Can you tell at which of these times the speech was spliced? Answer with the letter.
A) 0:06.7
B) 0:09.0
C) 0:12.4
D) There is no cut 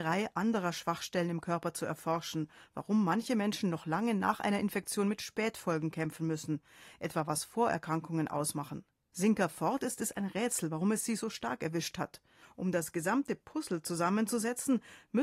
C